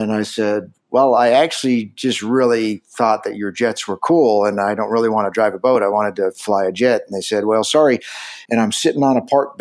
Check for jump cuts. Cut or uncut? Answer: cut